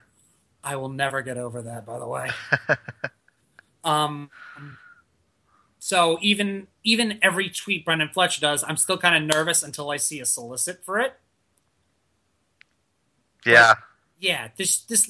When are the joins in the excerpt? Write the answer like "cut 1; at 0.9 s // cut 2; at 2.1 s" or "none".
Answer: none